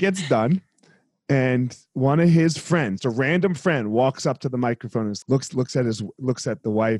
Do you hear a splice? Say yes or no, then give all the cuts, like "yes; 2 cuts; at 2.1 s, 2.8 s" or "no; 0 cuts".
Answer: yes; 2 cuts; at 3.0 s, 5.2 s